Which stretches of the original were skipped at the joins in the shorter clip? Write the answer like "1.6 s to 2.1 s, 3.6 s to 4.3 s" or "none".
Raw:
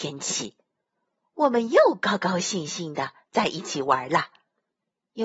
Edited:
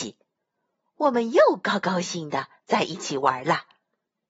2.4 s to 2.7 s